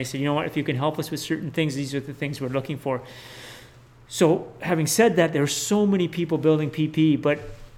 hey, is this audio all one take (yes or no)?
yes